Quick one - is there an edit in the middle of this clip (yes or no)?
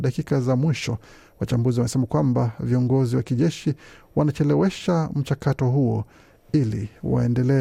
no